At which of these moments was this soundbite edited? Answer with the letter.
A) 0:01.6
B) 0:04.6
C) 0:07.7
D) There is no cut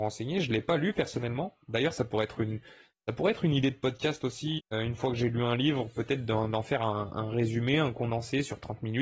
B